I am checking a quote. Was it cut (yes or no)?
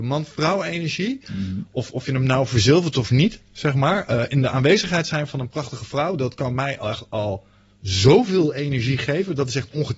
no